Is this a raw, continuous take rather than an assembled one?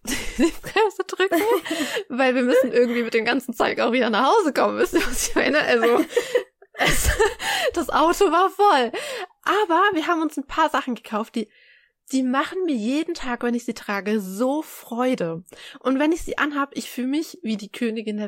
yes; 0 cuts

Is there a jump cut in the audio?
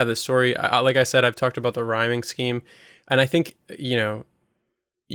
no; 0 cuts

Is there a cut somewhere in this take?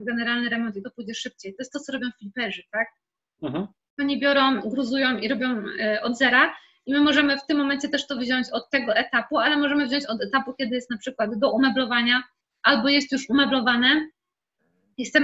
no; 0 cuts

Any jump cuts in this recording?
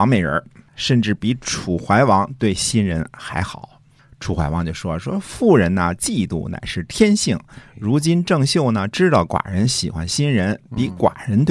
no; 0 cuts

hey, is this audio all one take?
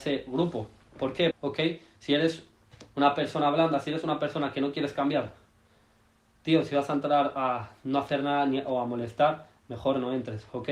no; 1 cut; at 1.3 s

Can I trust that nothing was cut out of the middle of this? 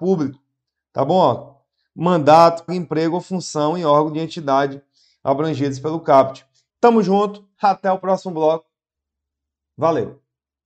no; 2 cuts; at 2.7 s, 6.7 s

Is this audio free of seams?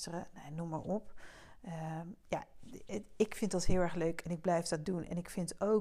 yes; 0 cuts

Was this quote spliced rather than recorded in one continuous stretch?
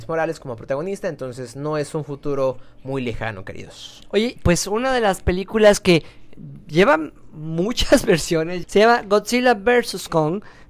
yes; 2 cuts; at 4.4 s, 8.6 s

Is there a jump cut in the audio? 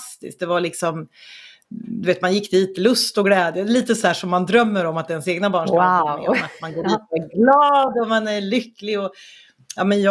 no; 0 cuts

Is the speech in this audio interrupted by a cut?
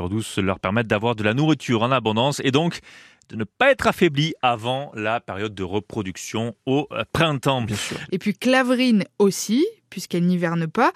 yes; 1 cut; at 8.1 s

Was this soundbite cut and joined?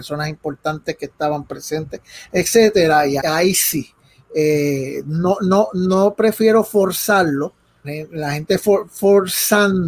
yes; 2 cuts; at 3.2 s, 7.8 s

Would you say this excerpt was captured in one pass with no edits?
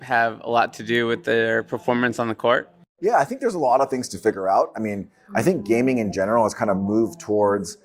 yes; 0 cuts

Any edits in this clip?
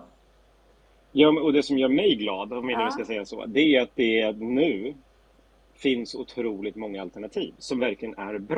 no; 0 cuts

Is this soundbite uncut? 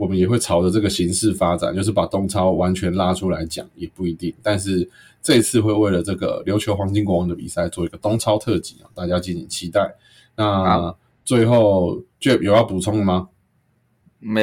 yes; 0 cuts

